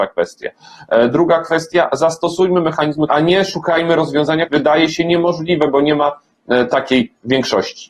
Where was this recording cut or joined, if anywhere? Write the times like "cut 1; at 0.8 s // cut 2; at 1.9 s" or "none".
cut 1; at 3.1 s // cut 2; at 4.5 s